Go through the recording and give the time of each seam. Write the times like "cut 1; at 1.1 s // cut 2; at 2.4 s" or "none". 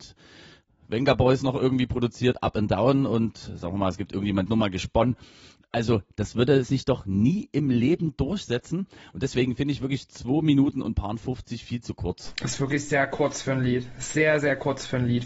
cut 1; at 4.5 s